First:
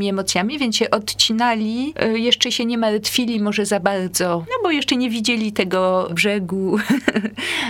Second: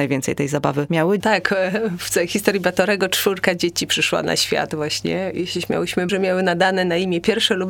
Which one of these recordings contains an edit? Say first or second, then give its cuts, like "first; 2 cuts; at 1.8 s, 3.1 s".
second; 2 cuts; at 1.2 s, 6.1 s